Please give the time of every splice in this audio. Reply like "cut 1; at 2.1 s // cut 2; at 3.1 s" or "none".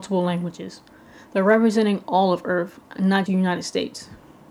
cut 1; at 3.3 s